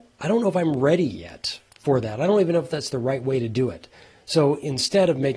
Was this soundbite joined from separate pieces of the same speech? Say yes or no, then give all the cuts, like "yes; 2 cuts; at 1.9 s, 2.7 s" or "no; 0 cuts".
yes; 1 cut; at 1.7 s